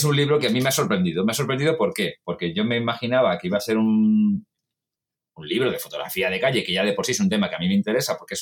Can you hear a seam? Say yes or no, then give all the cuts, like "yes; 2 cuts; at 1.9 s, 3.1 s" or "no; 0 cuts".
no; 0 cuts